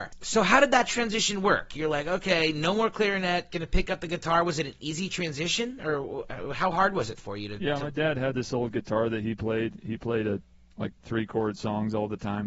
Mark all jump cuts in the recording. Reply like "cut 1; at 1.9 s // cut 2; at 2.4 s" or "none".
none